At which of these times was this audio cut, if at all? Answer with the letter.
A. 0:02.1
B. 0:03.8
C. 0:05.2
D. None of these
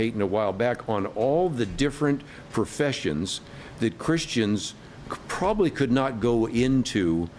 D